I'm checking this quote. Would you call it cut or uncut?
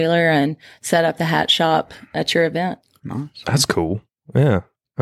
uncut